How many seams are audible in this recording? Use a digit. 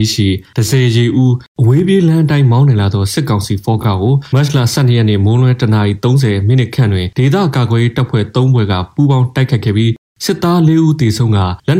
0